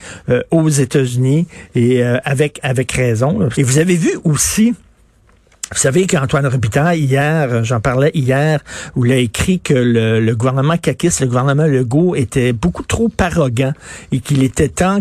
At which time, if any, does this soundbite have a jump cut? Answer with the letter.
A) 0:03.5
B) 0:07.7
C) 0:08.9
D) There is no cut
A